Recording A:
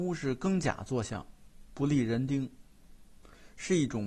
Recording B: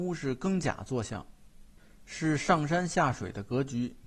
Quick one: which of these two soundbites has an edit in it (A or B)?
A